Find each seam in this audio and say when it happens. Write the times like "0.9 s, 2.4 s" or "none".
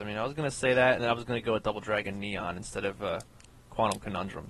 1.0 s